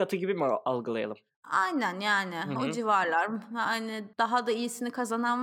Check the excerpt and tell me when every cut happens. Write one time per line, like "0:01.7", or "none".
0:04.1